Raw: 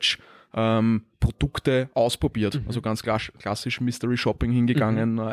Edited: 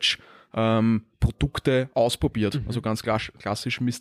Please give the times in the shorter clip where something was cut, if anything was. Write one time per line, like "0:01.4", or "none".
none